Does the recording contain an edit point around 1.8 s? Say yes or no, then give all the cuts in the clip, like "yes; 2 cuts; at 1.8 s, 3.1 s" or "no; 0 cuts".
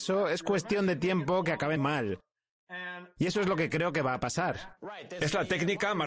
yes; 1 cut; at 1.8 s